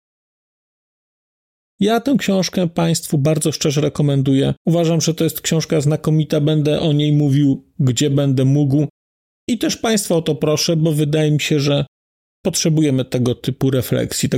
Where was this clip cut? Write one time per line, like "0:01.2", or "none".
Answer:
0:04.6

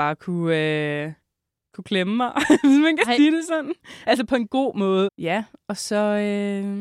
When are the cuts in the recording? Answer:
0:05.1

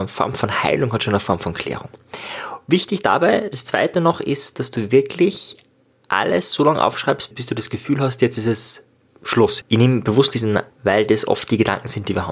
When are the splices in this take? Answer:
0:09.6
0:10.7

